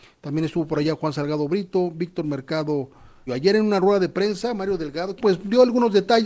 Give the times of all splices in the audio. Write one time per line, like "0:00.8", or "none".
0:03.3
0:05.2